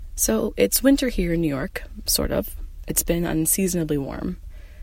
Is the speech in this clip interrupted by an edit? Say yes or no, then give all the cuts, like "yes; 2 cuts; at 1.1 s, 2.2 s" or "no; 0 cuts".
no; 0 cuts